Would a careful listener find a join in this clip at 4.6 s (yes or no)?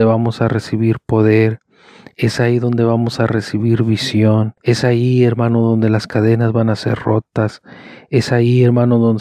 yes